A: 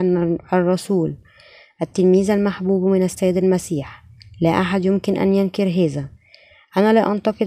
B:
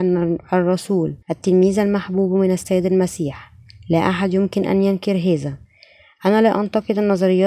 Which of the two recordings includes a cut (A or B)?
B